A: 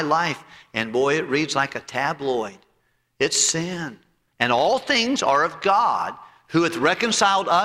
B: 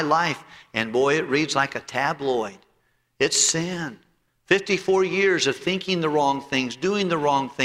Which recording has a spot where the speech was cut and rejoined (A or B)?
A